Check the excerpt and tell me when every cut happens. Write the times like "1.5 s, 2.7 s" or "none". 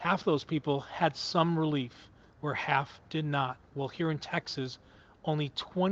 2.3 s